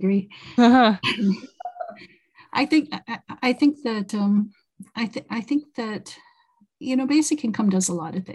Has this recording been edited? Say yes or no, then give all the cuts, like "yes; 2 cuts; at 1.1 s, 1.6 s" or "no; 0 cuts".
no; 0 cuts